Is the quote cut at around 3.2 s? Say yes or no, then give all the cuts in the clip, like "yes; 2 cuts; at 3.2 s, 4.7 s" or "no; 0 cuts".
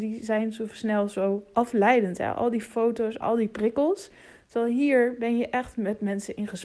yes; 1 cut; at 3.2 s